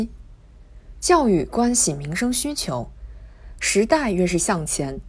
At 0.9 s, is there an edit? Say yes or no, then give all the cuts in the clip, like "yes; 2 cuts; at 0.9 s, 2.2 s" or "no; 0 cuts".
no; 1 cut; at 3.6 s